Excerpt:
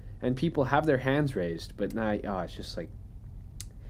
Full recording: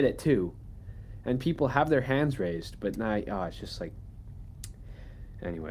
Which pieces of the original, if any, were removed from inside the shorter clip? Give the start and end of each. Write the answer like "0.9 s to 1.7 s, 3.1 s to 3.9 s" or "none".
none